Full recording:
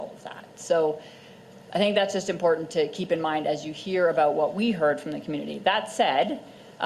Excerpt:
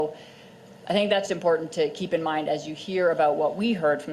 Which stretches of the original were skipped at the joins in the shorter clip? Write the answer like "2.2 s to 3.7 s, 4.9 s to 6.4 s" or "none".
2.1 s to 2.2 s